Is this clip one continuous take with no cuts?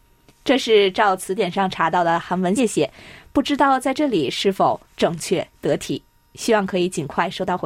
no; 1 cut; at 2.6 s

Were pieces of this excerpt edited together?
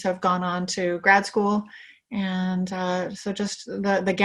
no; 0 cuts

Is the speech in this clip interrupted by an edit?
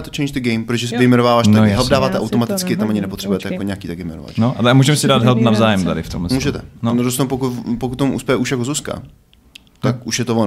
no; 0 cuts

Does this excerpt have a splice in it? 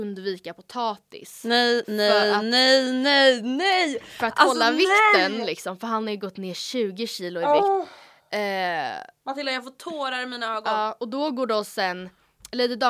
no; 0 cuts

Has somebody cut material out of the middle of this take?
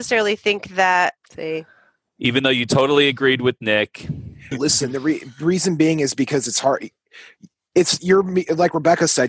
yes; 2 cuts; at 1.2 s, 4.5 s

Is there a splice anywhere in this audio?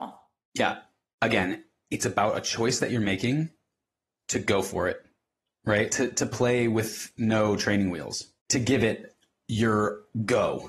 yes; 2 cuts; at 5.9 s, 8.4 s

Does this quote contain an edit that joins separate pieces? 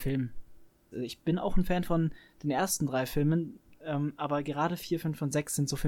yes; 1 cut; at 0.9 s

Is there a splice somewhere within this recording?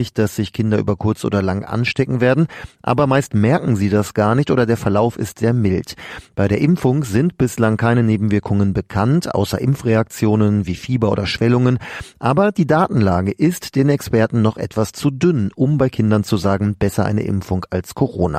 no; 0 cuts

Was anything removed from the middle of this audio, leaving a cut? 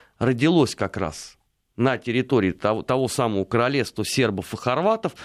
no; 0 cuts

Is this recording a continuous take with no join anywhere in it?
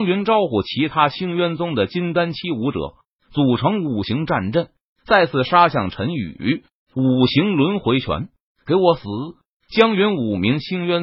yes; 0 cuts

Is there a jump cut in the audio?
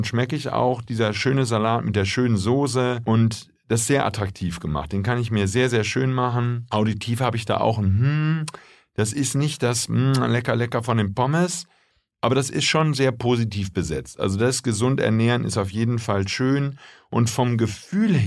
no; 0 cuts

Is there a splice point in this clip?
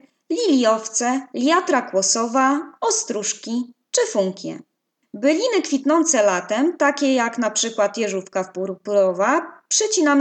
no; 0 cuts

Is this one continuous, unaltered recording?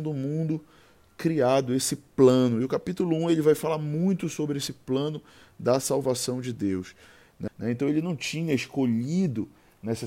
no; 1 cut; at 7.5 s

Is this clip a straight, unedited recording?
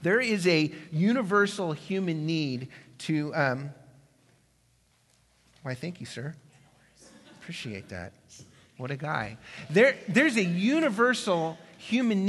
yes; 0 cuts

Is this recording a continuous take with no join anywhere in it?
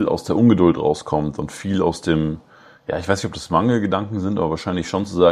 yes; 0 cuts

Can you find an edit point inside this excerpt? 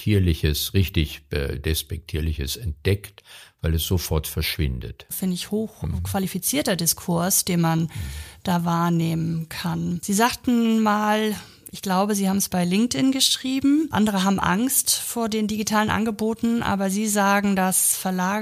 yes; 1 cut; at 5.1 s

